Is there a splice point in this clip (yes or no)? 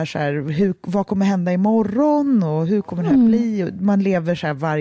no